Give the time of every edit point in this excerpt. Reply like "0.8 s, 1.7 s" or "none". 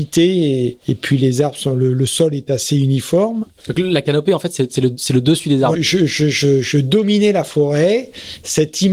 5.7 s